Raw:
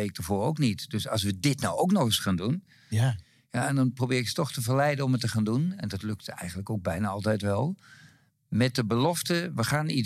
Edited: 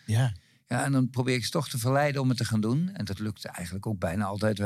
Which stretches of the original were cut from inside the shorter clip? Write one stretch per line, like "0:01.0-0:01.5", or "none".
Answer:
none

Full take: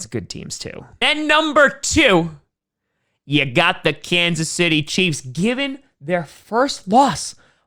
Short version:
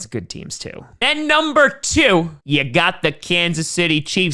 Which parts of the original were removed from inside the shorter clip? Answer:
0:02.4-0:03.2

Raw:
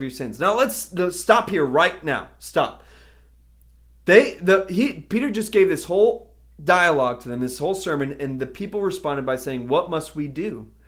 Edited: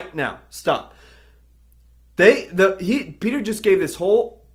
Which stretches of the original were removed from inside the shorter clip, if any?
none

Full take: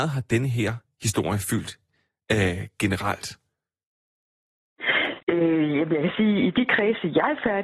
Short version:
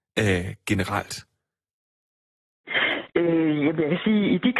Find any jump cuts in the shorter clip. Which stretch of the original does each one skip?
none

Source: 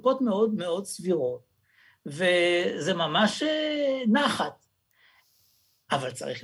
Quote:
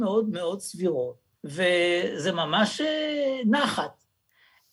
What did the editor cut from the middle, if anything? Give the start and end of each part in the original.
0:01.6-0:02.0

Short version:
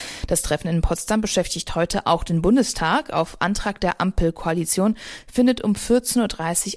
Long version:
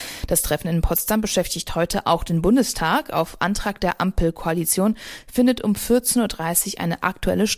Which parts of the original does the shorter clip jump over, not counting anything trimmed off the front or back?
none

